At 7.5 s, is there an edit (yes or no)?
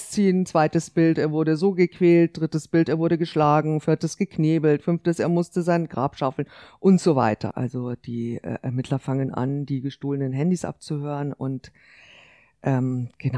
yes